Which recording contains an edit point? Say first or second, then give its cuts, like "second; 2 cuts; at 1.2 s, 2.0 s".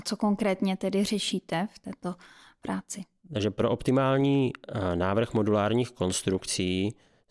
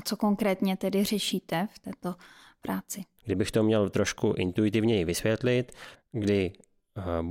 second; 2 cuts; at 3.2 s, 5.9 s